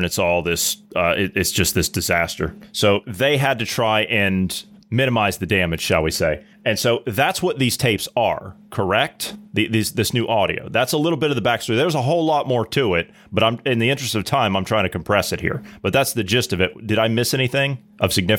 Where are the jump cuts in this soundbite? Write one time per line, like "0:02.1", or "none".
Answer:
none